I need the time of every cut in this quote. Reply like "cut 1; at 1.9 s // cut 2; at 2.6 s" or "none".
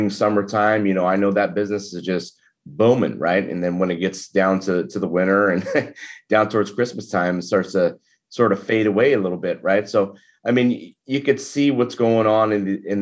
none

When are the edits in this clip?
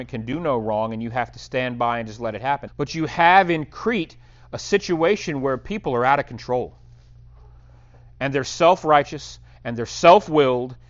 cut 1; at 2.7 s

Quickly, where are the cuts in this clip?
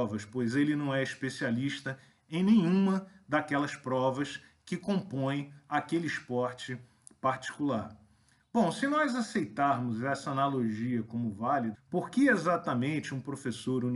cut 1; at 11.7 s

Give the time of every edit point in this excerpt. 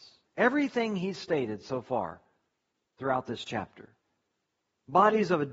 none

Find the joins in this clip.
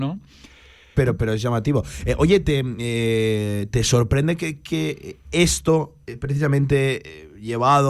cut 1; at 0.9 s

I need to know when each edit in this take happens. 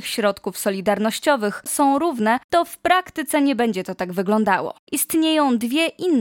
cut 1; at 1.7 s // cut 2; at 4.8 s

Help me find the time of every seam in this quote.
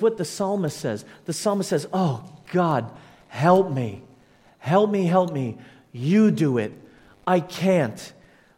none

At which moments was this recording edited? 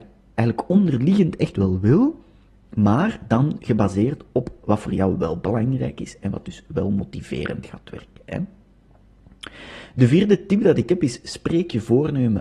none

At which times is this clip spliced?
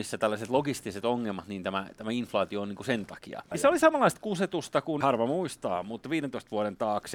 cut 1; at 3.5 s // cut 2; at 5.0 s

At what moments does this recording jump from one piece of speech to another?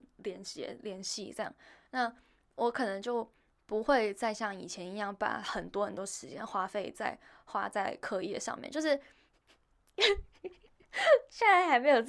none

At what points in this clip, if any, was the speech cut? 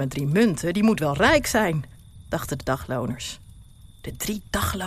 cut 1; at 3.9 s

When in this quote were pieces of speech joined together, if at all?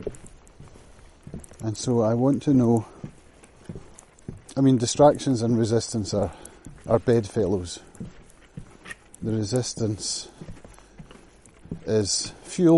cut 1; at 6.8 s

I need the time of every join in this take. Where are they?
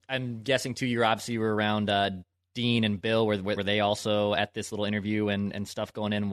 cut 1; at 3.6 s

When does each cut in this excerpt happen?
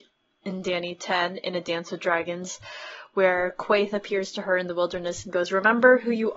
none

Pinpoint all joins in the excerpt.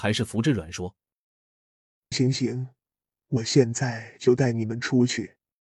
cut 1; at 2.1 s

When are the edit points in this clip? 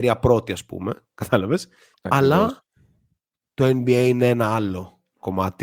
cut 1; at 1.9 s

